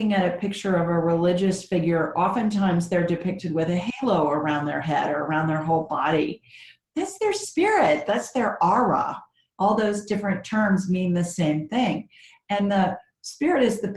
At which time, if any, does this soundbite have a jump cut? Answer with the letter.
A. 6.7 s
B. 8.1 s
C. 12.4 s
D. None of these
B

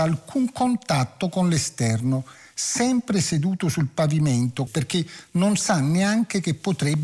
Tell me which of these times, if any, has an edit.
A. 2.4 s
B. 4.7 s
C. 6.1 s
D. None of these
B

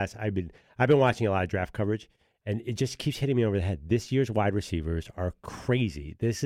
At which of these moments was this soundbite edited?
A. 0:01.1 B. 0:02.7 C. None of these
C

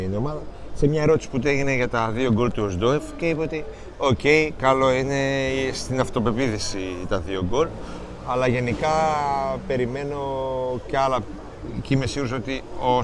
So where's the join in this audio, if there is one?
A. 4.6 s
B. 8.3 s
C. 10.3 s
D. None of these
D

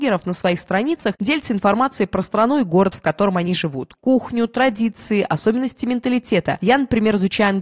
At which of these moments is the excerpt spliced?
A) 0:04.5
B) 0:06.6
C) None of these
C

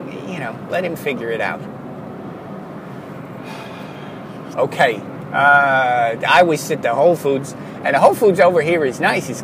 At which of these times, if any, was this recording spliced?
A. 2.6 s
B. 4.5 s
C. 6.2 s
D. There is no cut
B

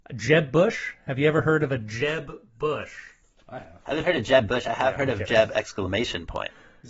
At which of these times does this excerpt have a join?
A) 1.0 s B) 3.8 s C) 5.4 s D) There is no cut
D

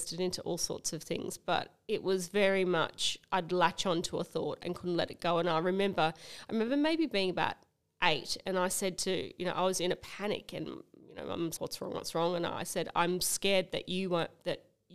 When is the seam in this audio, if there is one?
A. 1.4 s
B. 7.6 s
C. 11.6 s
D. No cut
C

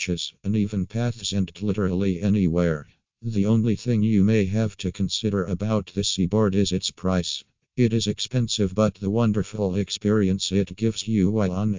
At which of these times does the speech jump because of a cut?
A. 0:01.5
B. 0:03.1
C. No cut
A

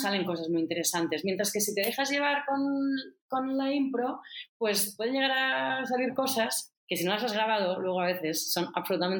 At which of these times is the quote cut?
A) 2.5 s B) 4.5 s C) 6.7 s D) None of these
C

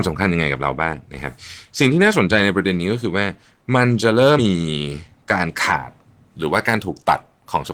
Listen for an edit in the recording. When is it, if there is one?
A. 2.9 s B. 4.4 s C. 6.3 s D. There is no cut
B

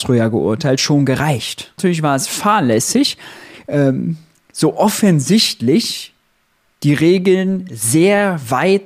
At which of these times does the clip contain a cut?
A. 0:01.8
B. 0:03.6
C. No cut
A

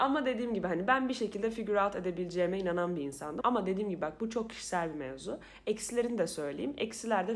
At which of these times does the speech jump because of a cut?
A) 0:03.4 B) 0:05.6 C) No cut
A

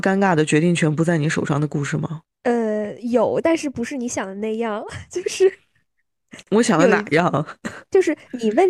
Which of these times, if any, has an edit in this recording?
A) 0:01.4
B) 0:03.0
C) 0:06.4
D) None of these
D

